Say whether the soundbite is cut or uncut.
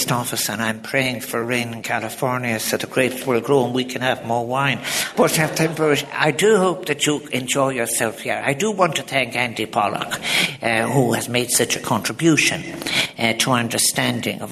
cut